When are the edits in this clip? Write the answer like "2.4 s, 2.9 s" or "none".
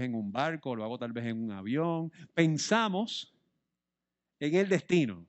none